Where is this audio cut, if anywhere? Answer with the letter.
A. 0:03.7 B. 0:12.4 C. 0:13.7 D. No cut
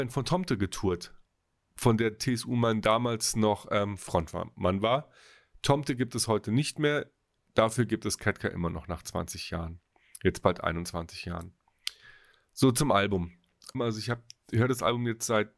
C